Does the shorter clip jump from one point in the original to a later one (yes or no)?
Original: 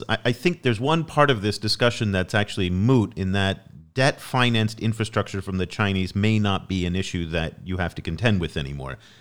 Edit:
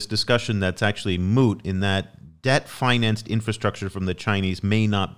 no